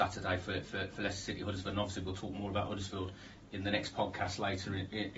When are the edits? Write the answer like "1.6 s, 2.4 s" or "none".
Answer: none